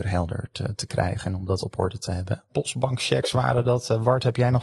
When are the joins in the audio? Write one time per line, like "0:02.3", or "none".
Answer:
0:02.5